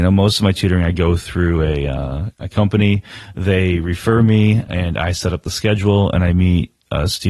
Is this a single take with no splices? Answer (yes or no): no